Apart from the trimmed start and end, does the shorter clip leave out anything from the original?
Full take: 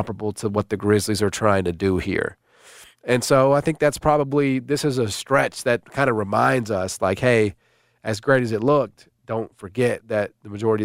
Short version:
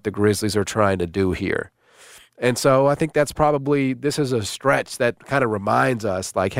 no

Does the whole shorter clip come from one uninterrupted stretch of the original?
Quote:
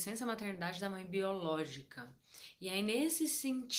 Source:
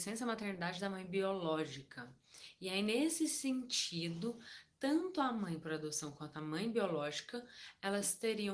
yes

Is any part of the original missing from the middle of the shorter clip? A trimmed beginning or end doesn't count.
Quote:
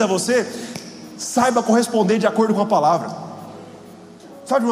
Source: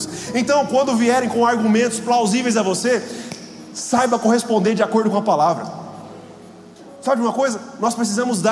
no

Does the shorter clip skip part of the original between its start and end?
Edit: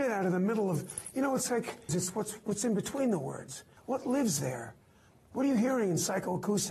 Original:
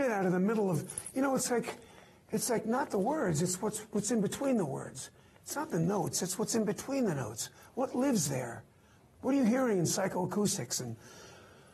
yes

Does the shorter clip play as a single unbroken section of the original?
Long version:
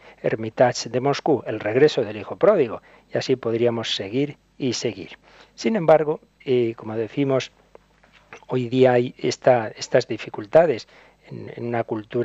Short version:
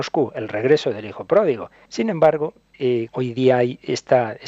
no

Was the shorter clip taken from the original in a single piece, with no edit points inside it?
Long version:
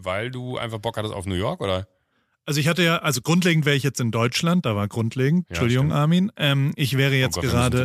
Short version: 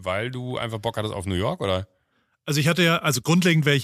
yes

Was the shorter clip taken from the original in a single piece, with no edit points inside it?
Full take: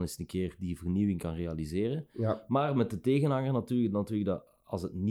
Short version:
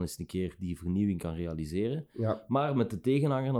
yes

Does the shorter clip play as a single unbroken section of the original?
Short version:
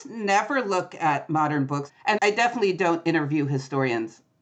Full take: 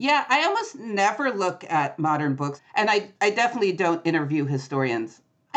no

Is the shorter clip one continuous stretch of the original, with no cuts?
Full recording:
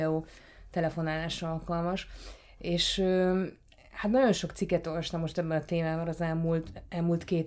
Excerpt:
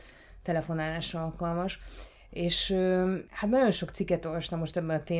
no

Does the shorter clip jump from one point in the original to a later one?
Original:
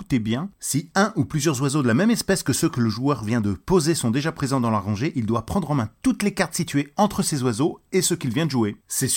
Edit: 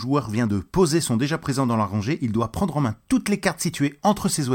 no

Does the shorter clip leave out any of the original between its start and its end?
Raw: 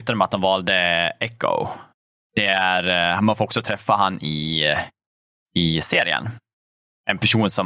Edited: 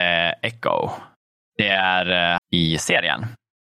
yes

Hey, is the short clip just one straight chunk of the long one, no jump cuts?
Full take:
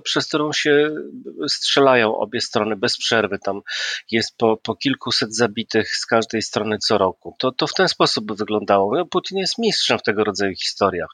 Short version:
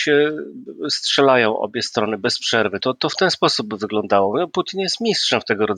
no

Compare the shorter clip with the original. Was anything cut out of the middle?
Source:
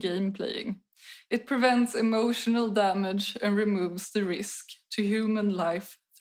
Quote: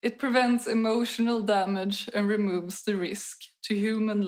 no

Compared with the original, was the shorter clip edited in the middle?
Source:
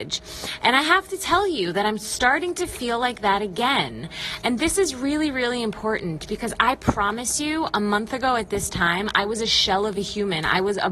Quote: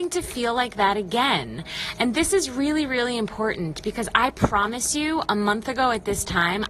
no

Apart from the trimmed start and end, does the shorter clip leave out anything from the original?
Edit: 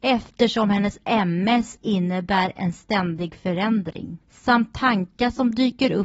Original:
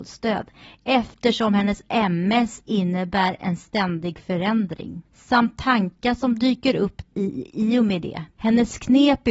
no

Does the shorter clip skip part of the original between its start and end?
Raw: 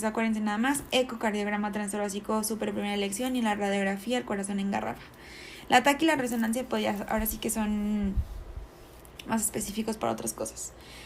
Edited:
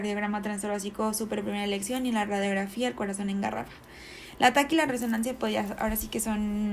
no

